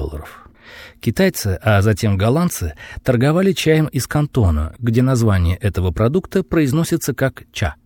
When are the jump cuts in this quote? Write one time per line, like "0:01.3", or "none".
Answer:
none